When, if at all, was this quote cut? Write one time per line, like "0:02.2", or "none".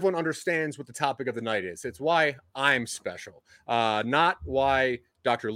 none